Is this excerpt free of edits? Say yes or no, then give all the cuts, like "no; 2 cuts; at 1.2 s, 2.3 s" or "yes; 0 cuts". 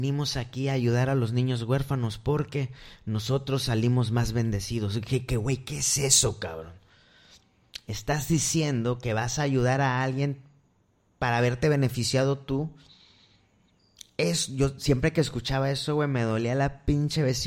yes; 0 cuts